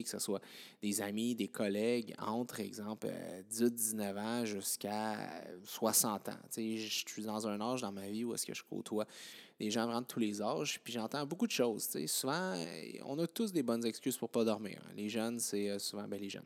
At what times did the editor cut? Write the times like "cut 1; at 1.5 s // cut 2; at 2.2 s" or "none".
none